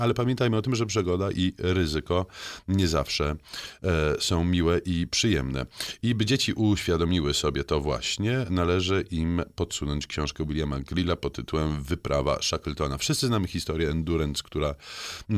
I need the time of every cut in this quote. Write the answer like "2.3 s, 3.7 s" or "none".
none

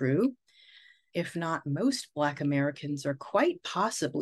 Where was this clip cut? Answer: 1.1 s

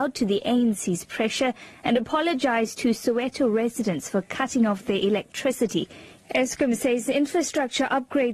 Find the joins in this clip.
6.2 s

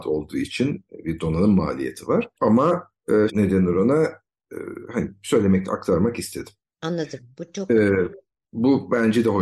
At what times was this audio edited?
3.3 s, 6.7 s

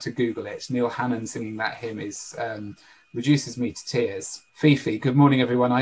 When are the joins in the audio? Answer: 4.5 s

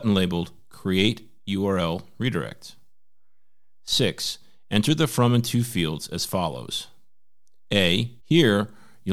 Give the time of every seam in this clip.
8.2 s

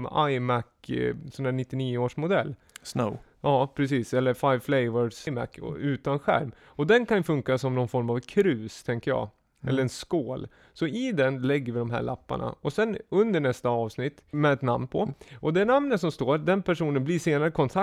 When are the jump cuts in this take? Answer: 5.3 s, 14.3 s

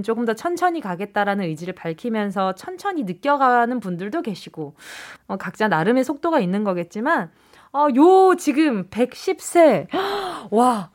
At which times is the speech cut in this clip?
5.2 s

